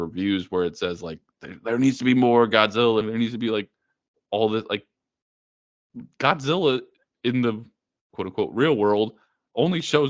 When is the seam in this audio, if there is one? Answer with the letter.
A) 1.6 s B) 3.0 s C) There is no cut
B